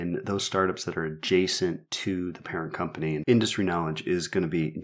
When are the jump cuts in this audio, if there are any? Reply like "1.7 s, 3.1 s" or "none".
3.2 s

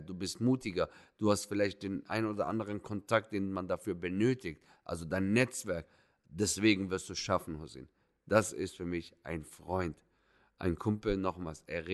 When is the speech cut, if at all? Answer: none

